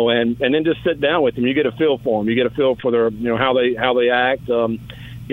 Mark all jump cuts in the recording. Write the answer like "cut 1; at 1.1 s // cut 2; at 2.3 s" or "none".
none